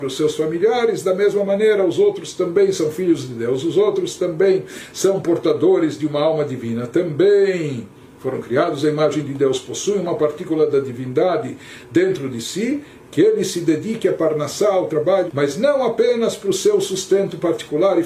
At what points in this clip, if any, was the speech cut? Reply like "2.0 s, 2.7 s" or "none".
13.0 s, 15.3 s

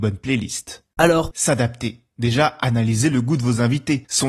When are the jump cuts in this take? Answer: 1.3 s

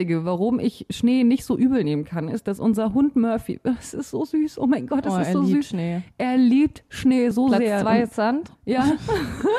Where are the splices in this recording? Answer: none

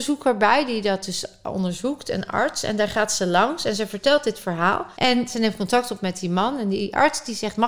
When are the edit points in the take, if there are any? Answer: 4.9 s

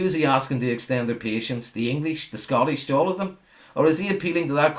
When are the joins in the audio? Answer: 2.9 s

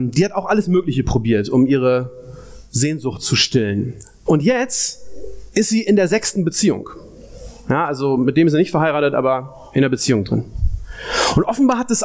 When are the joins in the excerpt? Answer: 4.3 s

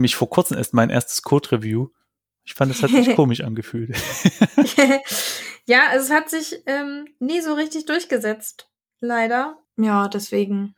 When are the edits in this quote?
9.6 s

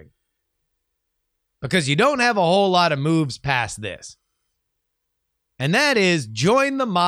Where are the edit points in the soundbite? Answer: 1.5 s

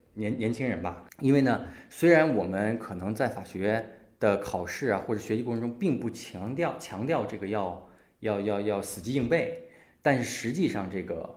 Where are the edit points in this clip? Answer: 1.1 s

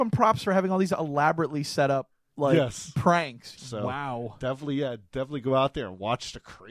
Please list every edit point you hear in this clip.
3.6 s

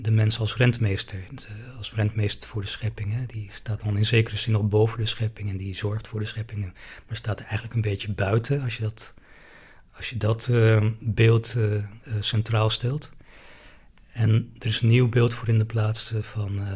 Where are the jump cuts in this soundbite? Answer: none

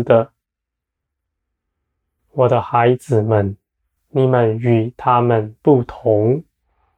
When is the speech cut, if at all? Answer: 4.0 s

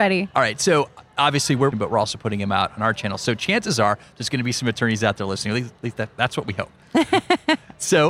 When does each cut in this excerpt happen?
1.7 s

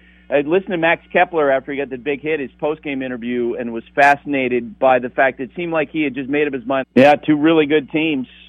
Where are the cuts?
6.8 s

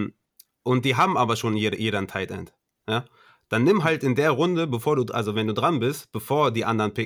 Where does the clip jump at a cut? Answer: none

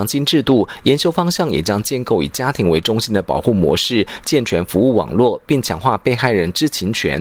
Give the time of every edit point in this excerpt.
none

